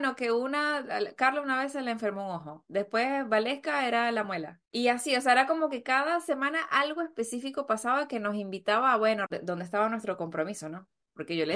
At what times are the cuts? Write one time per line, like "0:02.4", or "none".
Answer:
0:04.7
0:09.3